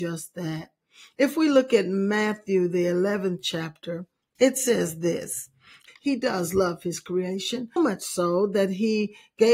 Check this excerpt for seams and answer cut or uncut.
cut